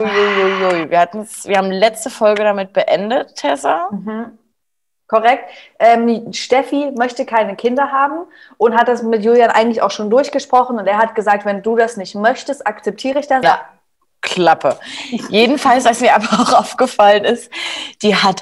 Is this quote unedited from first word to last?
no; 1 cut; at 13.4 s

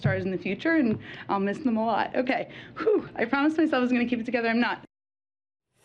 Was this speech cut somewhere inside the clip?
no; 0 cuts

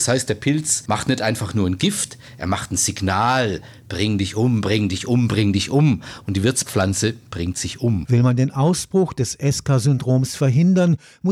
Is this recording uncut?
yes; 0 cuts

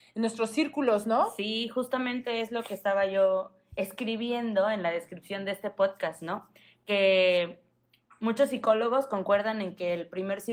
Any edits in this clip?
no; 0 cuts

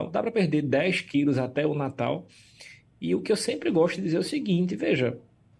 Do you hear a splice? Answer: no; 0 cuts

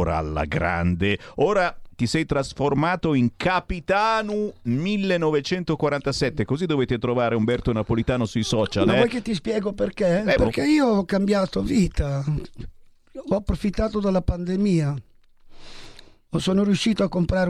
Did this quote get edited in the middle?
yes; 1 cut; at 10.4 s

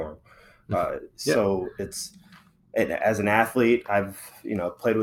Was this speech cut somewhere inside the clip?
no; 0 cuts

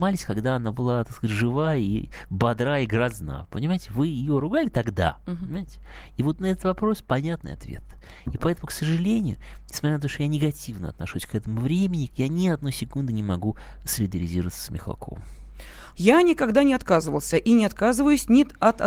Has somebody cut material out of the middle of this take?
yes; 2 cuts; at 12.1 s, 15.9 s

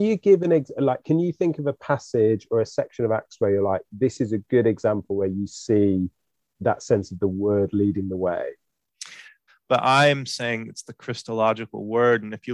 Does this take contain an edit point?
yes; 2 cuts; at 6.4 s, 9.5 s

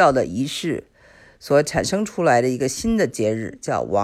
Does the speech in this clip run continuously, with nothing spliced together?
yes; 0 cuts

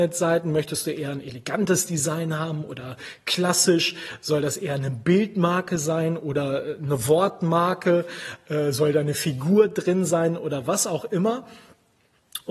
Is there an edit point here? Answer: no; 0 cuts

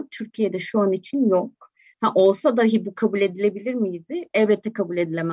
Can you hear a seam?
no; 0 cuts

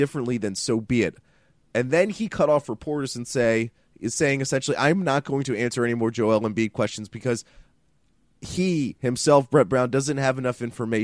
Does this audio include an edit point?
no; 0 cuts

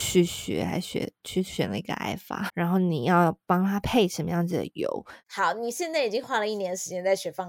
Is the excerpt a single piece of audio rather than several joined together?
no; 2 cuts; at 2.5 s, 5.2 s

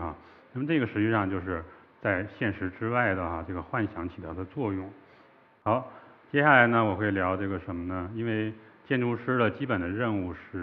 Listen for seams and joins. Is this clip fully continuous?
yes; 0 cuts

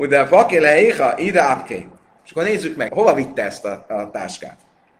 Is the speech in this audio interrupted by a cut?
yes; 1 cut; at 2.9 s

